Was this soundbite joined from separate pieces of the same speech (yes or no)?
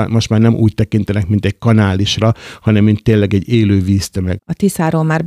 yes